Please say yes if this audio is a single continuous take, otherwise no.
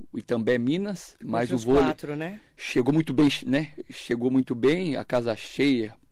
yes